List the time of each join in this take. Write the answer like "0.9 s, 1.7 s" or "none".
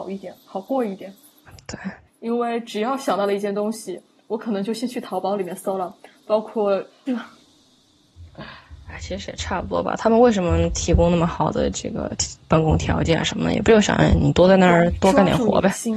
2.1 s, 7.1 s